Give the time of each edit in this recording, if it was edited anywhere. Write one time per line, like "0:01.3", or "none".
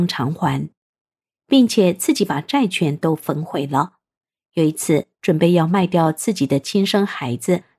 0:05.2